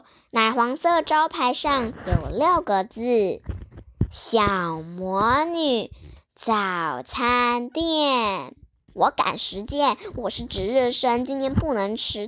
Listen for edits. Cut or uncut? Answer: cut